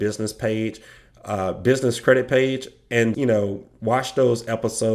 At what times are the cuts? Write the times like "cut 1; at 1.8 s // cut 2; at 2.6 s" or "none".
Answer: cut 1; at 3.1 s